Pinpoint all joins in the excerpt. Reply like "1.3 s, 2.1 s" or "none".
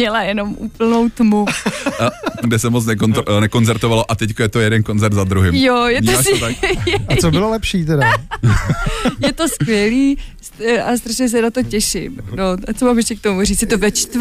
2.4 s